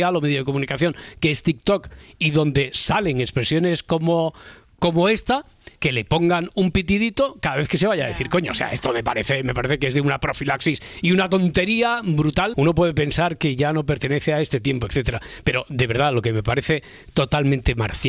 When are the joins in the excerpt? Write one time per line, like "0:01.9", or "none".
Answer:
0:05.8
0:12.5